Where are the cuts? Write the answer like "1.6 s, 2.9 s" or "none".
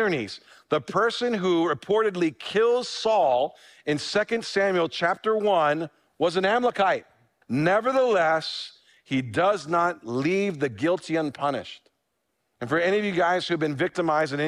7.4 s, 12.5 s